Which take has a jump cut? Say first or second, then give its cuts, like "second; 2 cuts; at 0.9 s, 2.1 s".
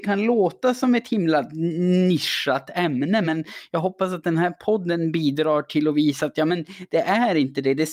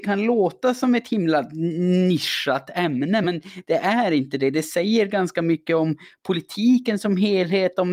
second; 1 cut; at 3.2 s